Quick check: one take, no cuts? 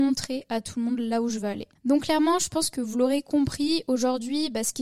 yes; 0 cuts

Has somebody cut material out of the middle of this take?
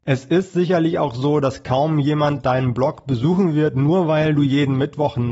no; 0 cuts

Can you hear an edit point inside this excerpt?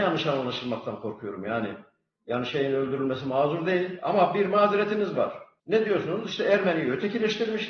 no; 0 cuts

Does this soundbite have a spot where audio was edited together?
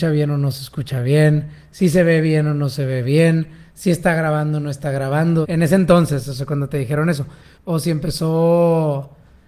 yes; 2 cuts; at 5.4 s, 7.5 s

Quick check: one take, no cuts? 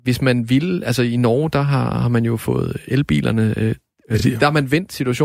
yes; 0 cuts

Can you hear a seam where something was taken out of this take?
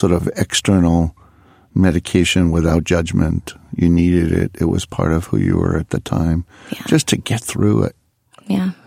no; 0 cuts

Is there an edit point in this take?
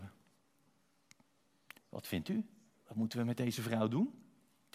yes; 1 cut; at 1.8 s

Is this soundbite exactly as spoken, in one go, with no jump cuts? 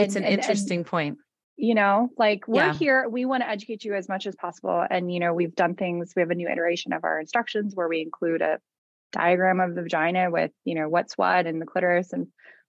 yes; 0 cuts

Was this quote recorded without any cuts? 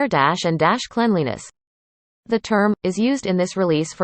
no; 1 cut; at 2.8 s

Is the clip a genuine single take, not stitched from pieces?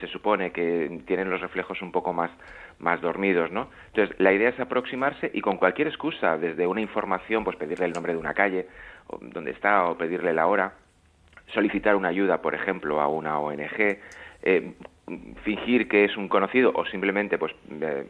yes; 0 cuts

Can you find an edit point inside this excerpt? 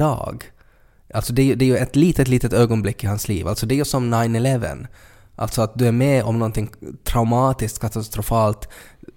no; 0 cuts

